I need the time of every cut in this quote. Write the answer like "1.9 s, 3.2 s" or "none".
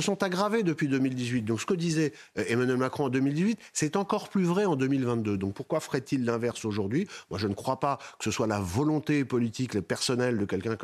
none